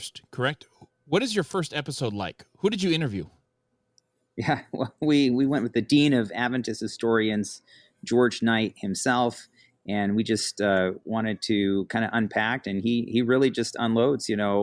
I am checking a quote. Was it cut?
no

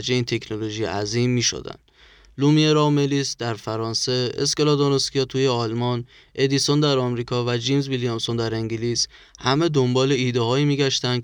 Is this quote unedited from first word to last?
yes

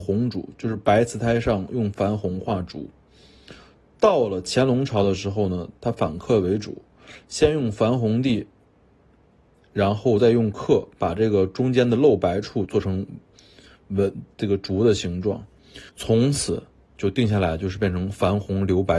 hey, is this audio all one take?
no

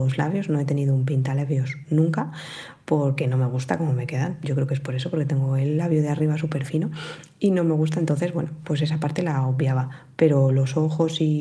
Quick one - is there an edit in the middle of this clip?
no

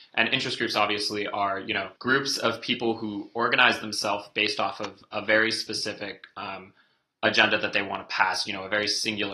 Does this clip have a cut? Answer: yes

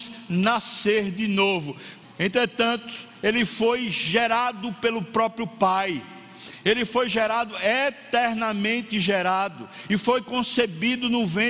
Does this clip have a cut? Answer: yes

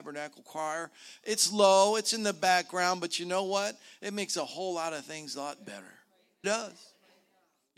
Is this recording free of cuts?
no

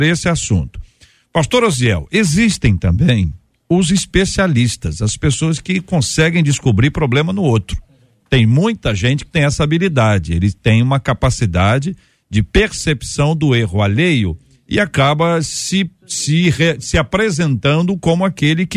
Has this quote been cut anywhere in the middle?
no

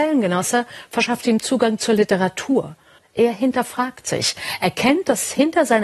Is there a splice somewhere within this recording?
yes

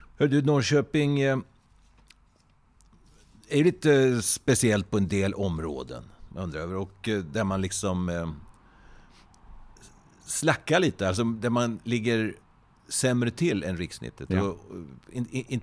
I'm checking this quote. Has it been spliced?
no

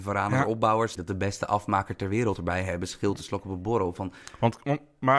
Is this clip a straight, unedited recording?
no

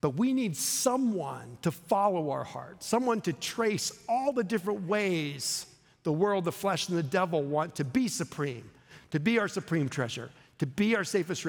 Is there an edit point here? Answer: no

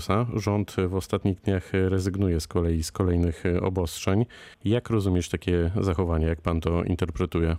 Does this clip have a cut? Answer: yes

